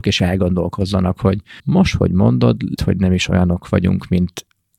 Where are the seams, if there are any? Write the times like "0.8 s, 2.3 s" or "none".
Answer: 1.6 s, 2.8 s